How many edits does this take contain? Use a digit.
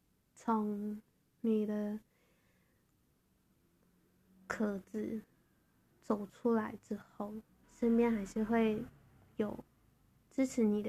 1